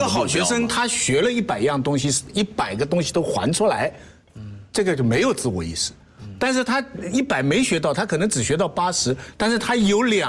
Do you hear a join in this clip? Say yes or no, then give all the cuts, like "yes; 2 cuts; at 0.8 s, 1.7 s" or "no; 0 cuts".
no; 0 cuts